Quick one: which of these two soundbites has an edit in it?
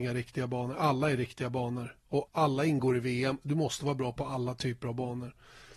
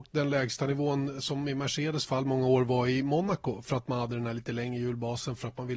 first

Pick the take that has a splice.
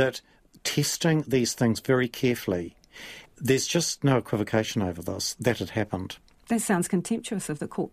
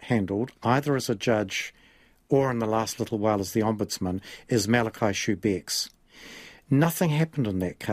first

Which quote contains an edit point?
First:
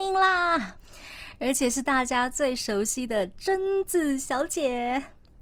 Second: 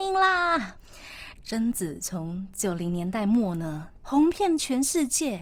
second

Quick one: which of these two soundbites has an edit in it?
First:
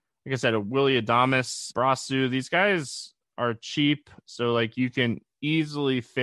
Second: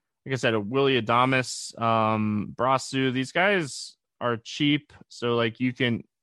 first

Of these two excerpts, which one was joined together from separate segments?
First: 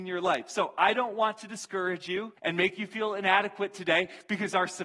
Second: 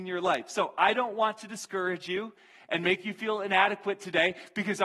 first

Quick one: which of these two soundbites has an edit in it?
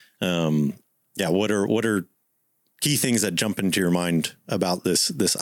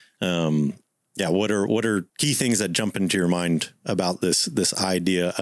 second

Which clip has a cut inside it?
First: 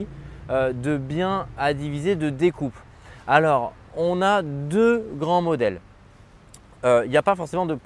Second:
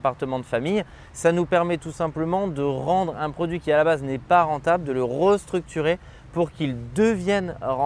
first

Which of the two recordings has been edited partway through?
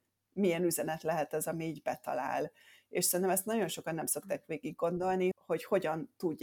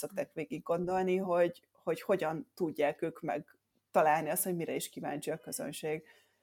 first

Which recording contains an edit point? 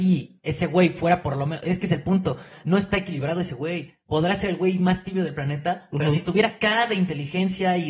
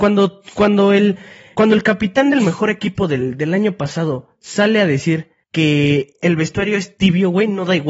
second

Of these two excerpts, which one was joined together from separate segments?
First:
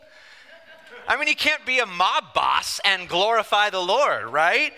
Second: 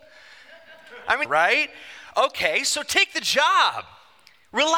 second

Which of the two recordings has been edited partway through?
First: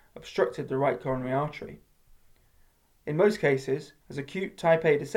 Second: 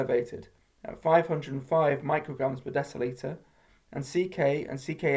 first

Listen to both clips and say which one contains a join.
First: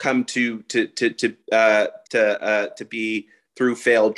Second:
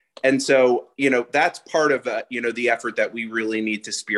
first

